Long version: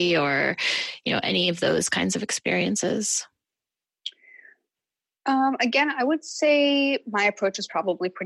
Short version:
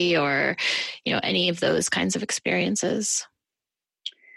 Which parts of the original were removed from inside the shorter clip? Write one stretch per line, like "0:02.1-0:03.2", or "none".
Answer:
none